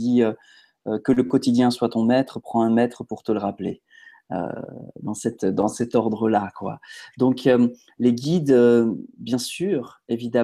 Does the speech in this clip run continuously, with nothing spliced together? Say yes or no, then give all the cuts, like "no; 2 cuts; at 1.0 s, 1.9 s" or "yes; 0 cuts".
yes; 0 cuts